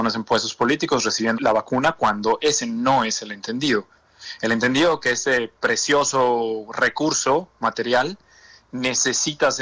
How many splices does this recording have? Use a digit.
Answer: 1